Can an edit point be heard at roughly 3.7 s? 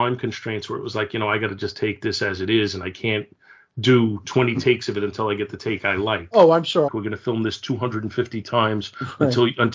no; 1 cut; at 6.9 s

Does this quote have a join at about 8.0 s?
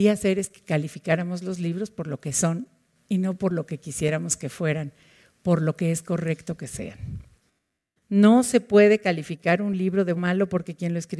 yes; 2 cuts; at 8.0 s, 10.2 s

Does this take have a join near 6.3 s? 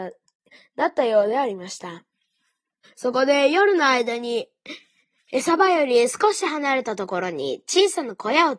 no; 1 cut; at 2.8 s

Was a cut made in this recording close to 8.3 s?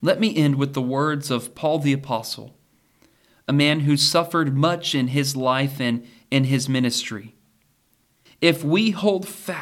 yes; 1 cut; at 8.3 s

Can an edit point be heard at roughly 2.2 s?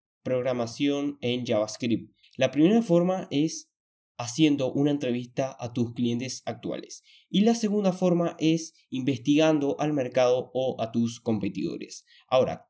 yes; 1 cut; at 2.2 s

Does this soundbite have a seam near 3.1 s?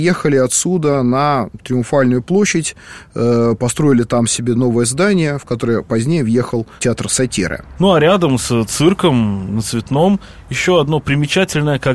no; 0 cuts

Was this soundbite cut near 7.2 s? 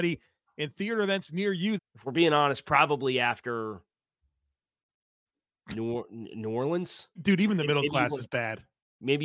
yes; 2 cuts; at 1.8 s, 7.2 s

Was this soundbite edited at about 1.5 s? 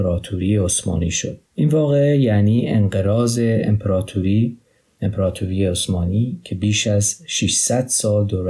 yes; 1 cut; at 1.5 s

